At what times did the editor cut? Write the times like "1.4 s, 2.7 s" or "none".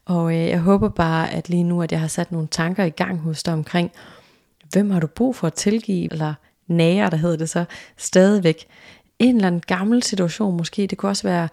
6.1 s